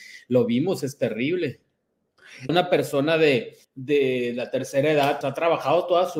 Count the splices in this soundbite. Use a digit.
3